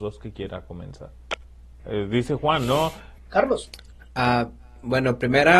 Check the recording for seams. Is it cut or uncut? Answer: cut